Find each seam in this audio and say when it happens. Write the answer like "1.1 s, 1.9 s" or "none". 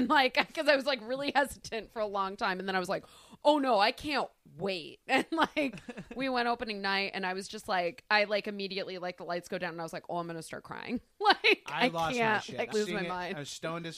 12.7 s